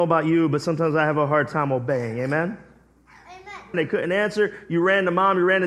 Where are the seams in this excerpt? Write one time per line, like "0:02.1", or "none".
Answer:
0:03.7

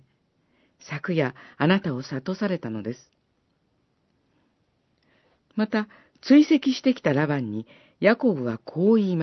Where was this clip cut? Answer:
0:05.4

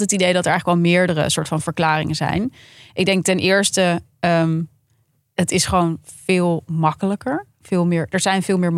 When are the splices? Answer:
none

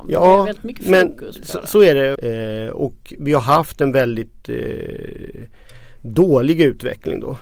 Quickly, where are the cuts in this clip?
0:02.2

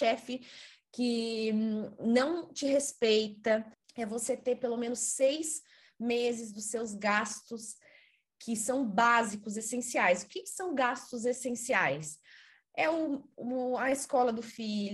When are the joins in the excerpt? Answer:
0:03.8

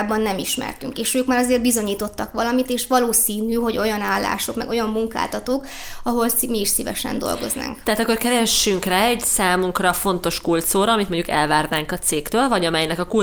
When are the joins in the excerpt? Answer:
none

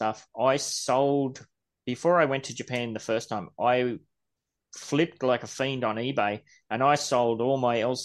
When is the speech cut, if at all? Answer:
none

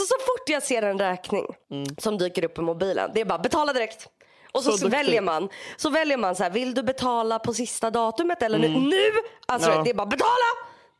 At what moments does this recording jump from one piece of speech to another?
0:01.6

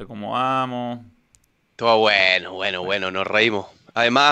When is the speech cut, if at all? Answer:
0:01.6

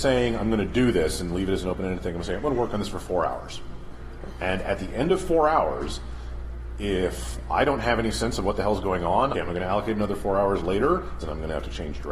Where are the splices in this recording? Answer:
0:09.3
0:11.2

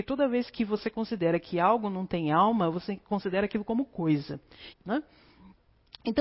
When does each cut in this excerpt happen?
0:04.7

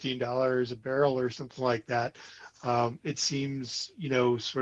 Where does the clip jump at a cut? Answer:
none

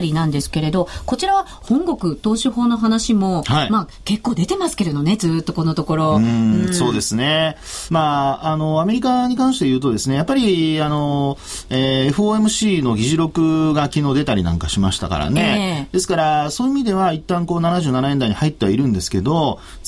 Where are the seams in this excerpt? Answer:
none

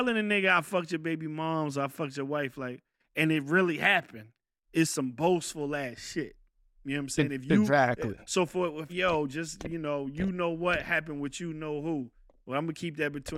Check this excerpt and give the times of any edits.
0:08.9

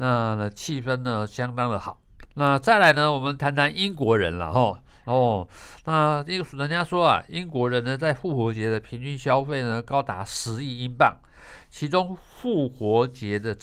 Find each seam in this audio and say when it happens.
0:02.3
0:05.0

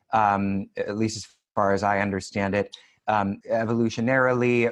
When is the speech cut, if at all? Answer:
0:03.4

